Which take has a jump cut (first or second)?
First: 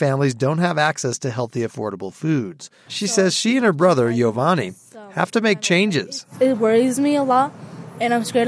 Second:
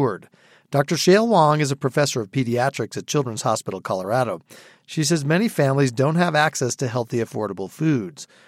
first